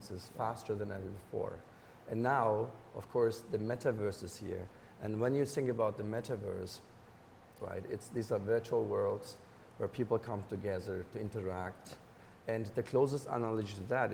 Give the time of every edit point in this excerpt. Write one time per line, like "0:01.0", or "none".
0:07.6

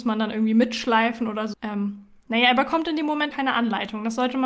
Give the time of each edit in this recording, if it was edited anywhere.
0:01.5
0:03.3

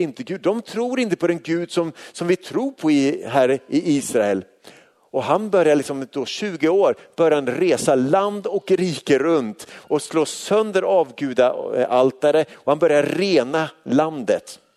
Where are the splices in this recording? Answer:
none

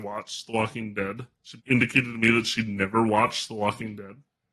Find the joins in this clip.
0:01.6

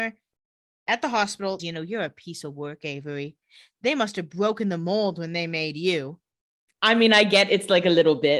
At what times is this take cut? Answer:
0:01.6

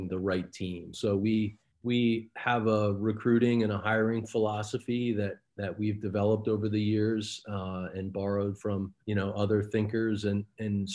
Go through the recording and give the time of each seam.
0:00.9
0:09.0

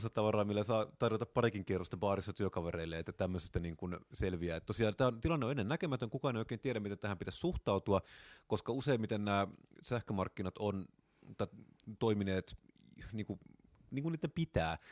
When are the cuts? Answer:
none

